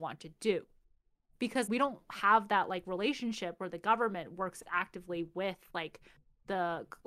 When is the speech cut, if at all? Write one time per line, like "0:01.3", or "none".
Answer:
0:01.7